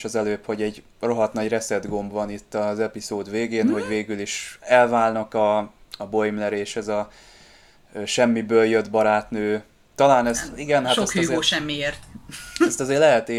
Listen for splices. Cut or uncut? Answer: uncut